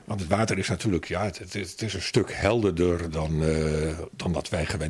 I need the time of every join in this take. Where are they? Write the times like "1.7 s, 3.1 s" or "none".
none

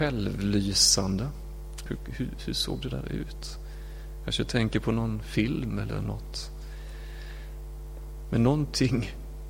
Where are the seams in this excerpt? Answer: 1.9 s

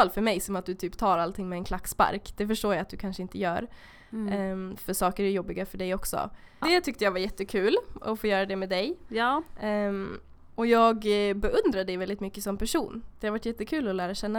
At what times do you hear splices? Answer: 6.6 s

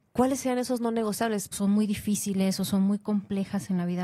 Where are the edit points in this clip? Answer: 1.5 s

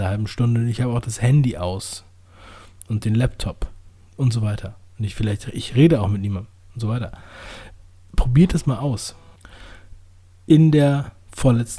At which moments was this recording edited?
none

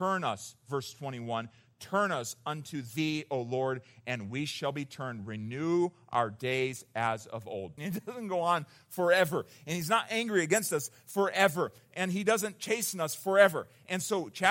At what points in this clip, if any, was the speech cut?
7.8 s

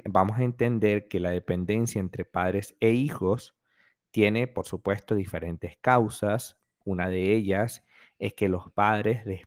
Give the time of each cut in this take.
none

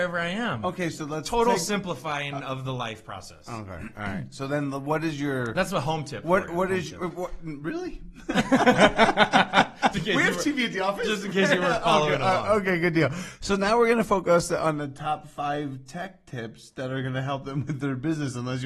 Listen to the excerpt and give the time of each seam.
9.9 s

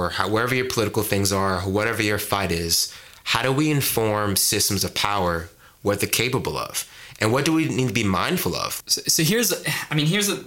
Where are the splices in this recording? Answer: 8.8 s

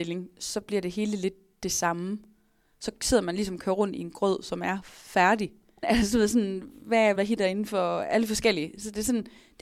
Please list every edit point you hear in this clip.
5.8 s, 7.2 s

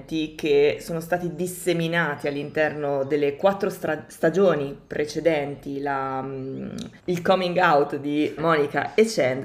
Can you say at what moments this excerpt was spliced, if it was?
7.0 s, 8.4 s

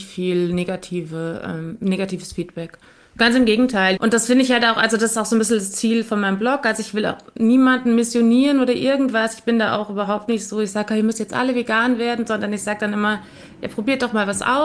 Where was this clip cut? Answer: 4.0 s

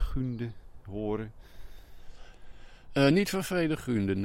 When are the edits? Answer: none

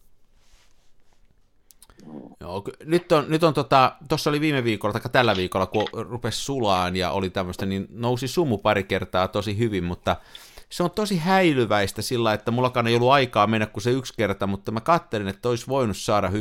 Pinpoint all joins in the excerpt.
2.3 s, 4.1 s

